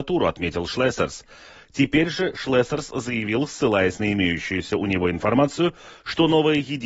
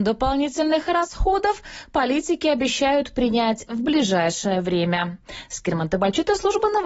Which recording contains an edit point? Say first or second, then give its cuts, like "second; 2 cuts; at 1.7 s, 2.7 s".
first; 1 cut; at 1.6 s